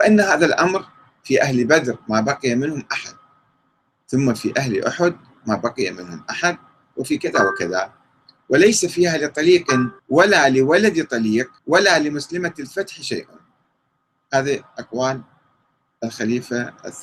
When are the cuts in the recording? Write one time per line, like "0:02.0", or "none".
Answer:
0:10.0
0:11.6